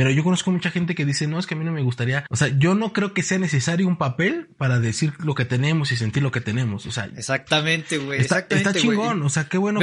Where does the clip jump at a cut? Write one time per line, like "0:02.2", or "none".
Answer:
none